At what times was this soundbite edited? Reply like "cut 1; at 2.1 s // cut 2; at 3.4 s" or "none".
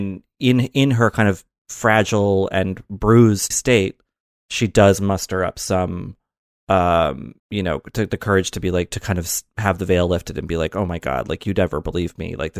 cut 1; at 3.5 s // cut 2; at 7.4 s